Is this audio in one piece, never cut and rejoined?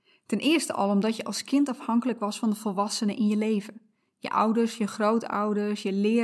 yes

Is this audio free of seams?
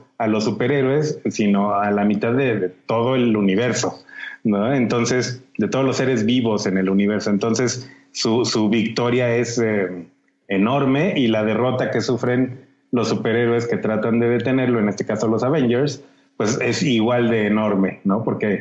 no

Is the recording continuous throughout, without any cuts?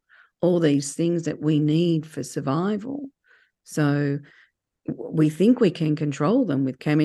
yes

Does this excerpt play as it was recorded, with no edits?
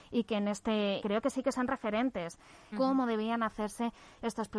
no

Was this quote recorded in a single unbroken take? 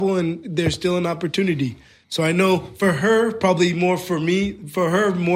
no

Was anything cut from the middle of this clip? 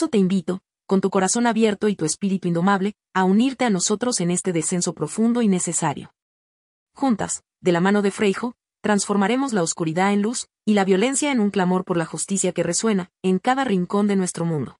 yes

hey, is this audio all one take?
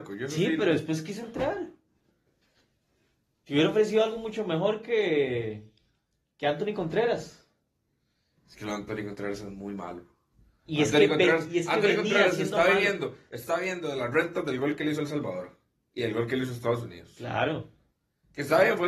yes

